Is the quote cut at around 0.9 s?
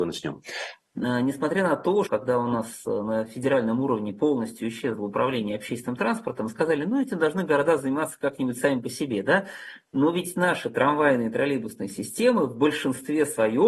yes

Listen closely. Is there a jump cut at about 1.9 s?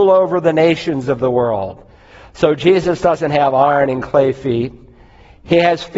no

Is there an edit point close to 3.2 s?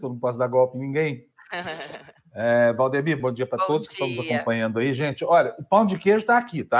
yes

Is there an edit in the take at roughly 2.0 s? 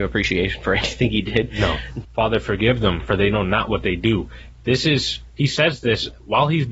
yes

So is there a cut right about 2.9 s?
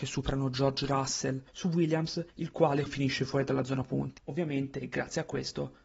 yes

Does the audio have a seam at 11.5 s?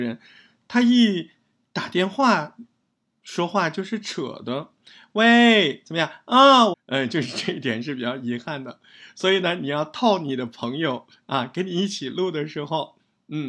no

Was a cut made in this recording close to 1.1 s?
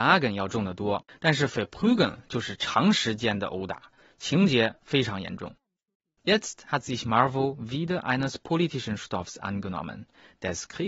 yes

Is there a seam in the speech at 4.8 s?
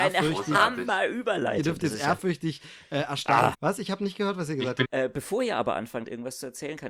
yes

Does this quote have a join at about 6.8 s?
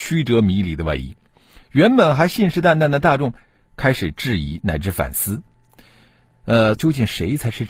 yes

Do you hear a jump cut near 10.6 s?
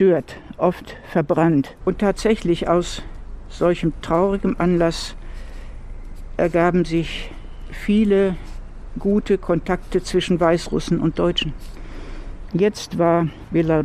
no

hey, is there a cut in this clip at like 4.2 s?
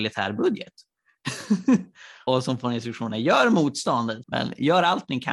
yes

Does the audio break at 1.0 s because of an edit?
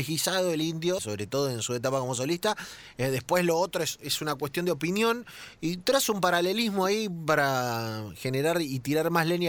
yes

